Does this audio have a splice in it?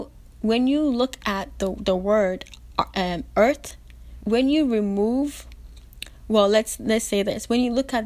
yes; 1 cut; at 4.2 s

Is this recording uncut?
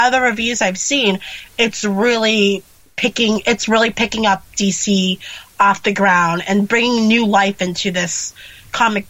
yes; 0 cuts

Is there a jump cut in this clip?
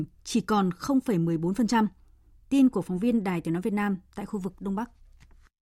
no; 0 cuts

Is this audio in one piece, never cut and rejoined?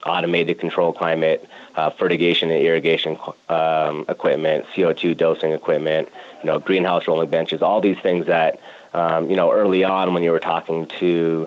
yes; 0 cuts

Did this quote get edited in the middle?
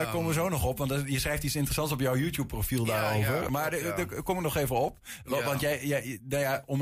no; 0 cuts

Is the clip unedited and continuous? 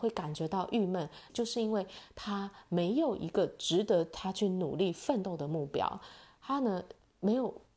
no; 1 cut; at 1.3 s

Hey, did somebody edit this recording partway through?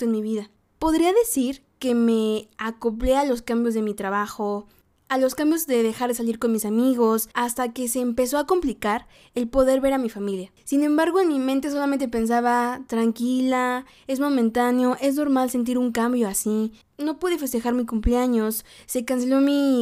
no; 0 cuts

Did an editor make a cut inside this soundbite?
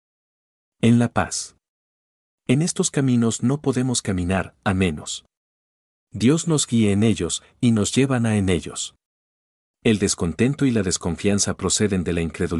no; 0 cuts

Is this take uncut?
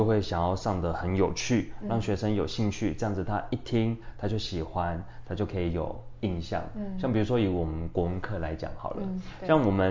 yes; 0 cuts

